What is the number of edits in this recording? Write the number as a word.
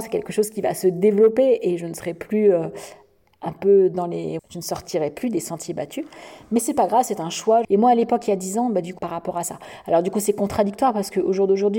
three